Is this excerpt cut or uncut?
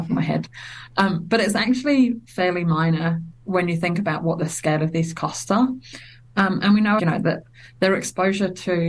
cut